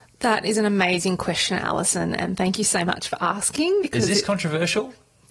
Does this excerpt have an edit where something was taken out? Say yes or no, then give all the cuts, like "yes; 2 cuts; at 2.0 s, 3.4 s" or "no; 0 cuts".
no; 0 cuts